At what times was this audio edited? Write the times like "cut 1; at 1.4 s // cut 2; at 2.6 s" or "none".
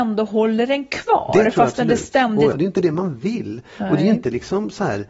cut 1; at 2.5 s